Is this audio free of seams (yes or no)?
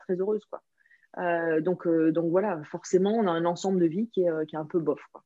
no